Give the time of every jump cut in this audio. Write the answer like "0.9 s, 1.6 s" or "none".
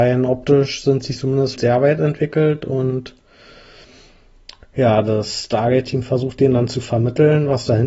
1.6 s